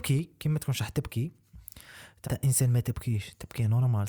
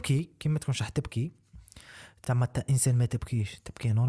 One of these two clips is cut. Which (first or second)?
first